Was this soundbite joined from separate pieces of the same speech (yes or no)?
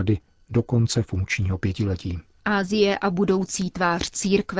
yes